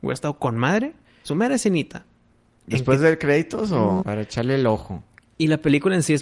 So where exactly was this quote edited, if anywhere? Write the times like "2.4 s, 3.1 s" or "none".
1.2 s, 4.0 s